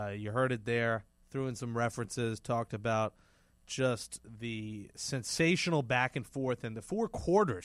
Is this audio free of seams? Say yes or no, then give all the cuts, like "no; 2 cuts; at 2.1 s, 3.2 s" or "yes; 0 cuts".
yes; 0 cuts